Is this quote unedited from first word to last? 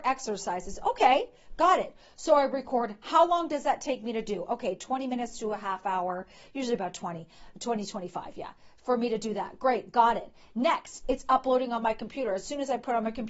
yes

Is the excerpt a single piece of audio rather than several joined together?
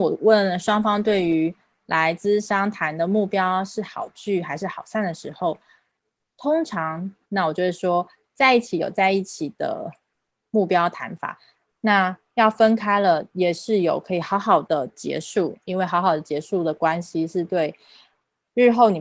no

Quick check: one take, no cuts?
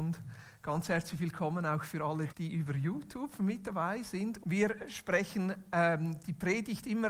no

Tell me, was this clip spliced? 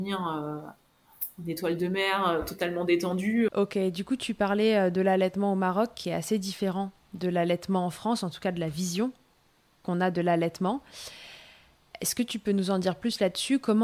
yes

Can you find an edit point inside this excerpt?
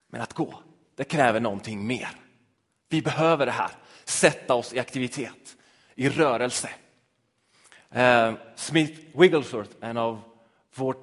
no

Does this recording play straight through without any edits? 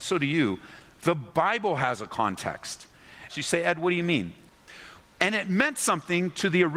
no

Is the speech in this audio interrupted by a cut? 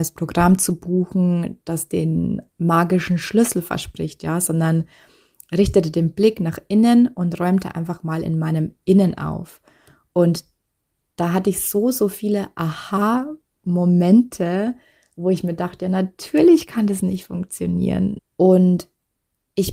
yes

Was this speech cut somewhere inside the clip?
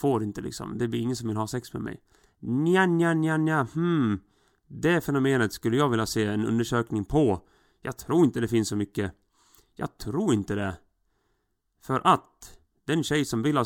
no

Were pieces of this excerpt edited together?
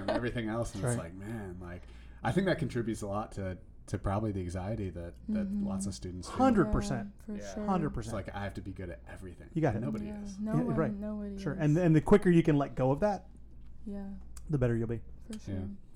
no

